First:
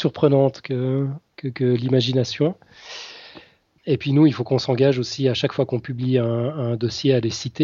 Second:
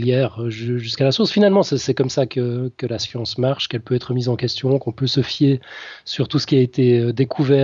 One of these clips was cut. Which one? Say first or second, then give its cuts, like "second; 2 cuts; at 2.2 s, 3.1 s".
first; 1 cut; at 3.8 s